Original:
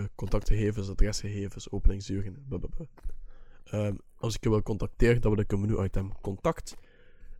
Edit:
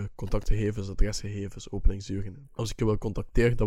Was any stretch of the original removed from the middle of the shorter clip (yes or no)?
yes